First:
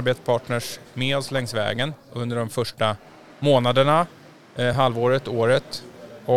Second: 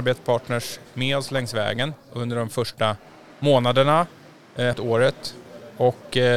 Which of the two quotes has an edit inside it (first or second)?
second